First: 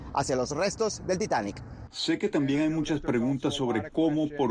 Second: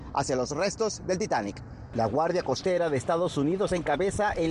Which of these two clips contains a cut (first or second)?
first